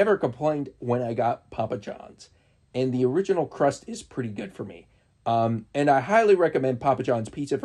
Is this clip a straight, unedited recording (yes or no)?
no